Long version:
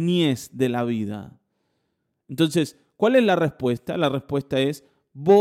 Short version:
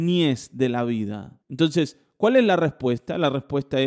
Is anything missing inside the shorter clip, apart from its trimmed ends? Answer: yes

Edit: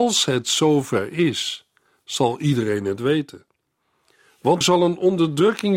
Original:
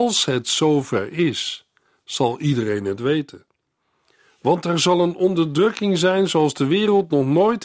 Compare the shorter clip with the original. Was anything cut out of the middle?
yes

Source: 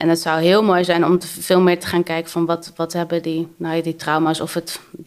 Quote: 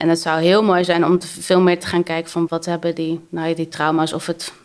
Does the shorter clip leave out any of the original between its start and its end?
yes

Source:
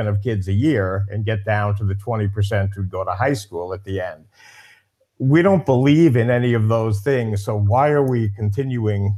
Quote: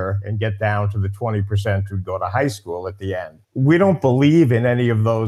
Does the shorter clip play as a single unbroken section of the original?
no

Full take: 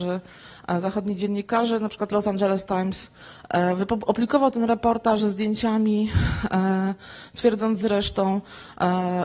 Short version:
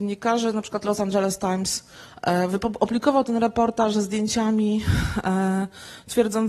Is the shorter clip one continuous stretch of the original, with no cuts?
yes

